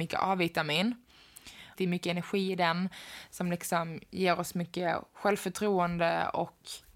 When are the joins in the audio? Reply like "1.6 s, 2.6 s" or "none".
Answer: 1.7 s